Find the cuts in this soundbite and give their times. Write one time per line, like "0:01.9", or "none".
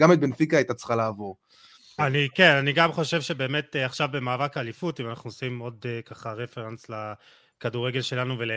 0:02.0